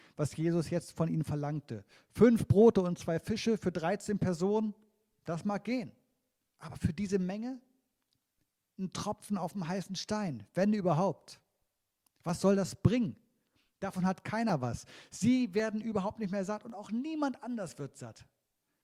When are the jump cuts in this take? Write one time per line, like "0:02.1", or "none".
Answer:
none